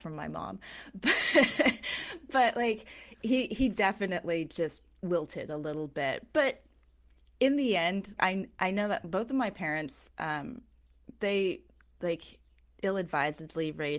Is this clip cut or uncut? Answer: cut